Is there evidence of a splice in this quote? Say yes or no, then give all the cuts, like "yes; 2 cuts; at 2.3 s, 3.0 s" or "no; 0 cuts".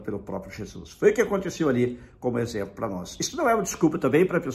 no; 0 cuts